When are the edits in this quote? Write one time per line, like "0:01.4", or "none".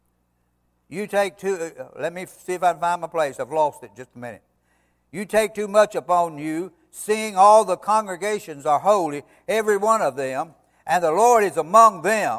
none

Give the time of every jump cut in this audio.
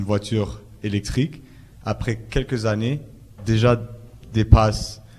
0:03.4

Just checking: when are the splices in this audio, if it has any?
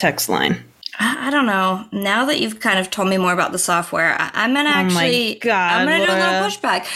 none

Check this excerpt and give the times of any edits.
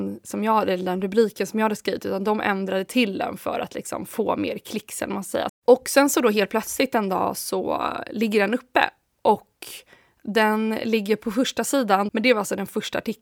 0:05.5
0:12.1

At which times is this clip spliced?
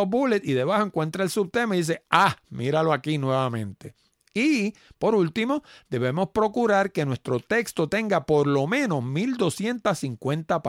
none

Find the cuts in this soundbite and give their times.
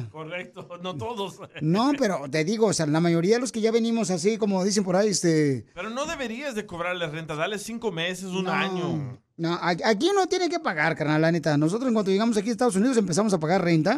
none

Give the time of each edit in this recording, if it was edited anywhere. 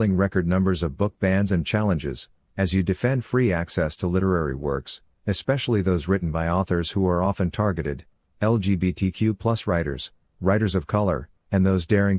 none

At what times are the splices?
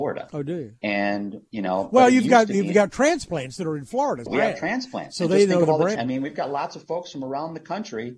0:04.3
0:05.9

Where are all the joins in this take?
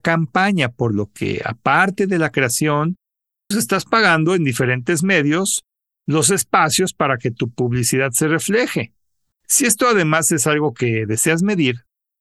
0:03.5
0:09.3

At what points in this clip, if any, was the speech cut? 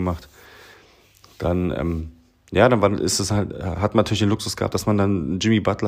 none

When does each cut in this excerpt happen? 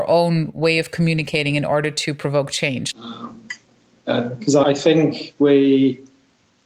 0:02.9
0:04.6

